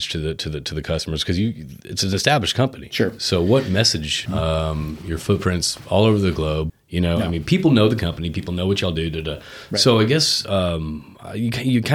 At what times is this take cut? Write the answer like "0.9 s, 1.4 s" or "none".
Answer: 4.3 s, 6.7 s

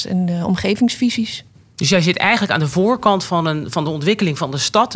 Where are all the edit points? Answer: none

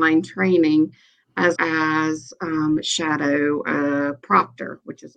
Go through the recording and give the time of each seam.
1.6 s

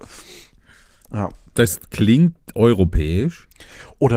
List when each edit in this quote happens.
none

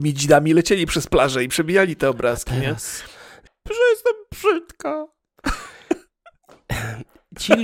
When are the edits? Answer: 3.5 s

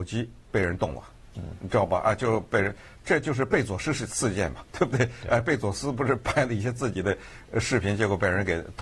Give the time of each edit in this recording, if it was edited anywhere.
none

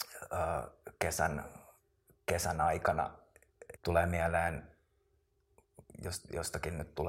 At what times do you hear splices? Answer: 3.8 s

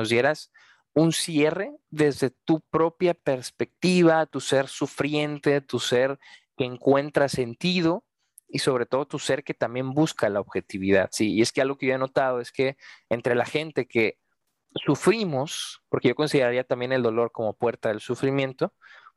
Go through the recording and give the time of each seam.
none

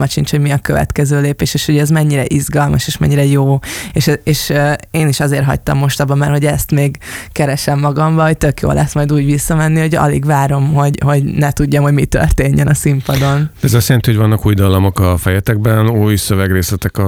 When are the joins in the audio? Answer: none

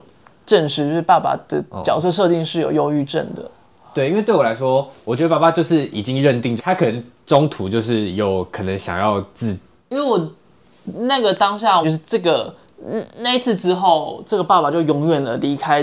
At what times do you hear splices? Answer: 6.6 s, 9.7 s, 11.8 s

